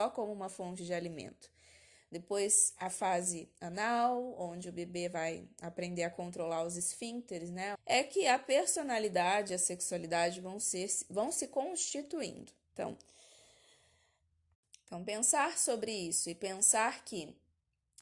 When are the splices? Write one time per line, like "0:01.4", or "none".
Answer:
0:07.7